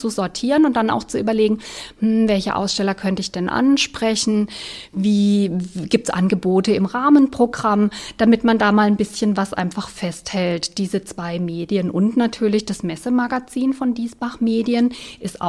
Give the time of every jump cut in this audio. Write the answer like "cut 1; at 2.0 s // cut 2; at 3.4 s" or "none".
none